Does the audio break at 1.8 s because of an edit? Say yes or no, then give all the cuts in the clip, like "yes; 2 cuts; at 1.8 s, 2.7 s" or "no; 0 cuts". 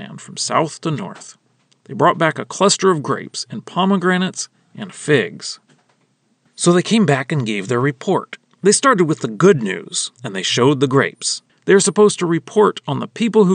no; 2 cuts; at 10.1 s, 11.5 s